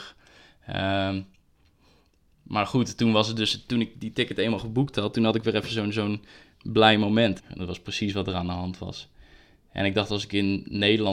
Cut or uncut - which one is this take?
cut